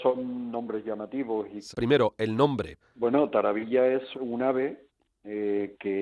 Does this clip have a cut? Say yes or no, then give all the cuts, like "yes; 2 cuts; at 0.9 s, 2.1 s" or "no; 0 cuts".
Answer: yes; 3 cuts; at 1.7 s, 2.8 s, 4.1 s